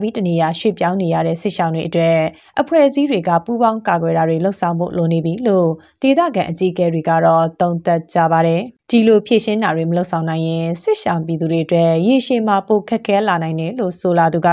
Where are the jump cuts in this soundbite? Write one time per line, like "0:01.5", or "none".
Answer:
0:08.8